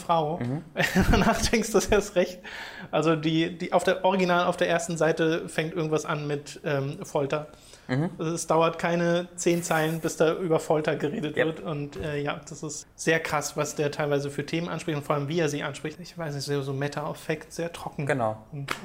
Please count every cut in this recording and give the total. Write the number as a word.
two